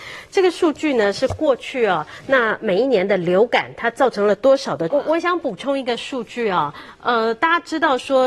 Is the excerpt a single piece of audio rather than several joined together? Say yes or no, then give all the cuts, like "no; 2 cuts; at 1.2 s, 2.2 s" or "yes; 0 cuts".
no; 1 cut; at 4.9 s